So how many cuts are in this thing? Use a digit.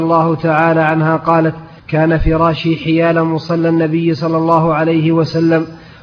1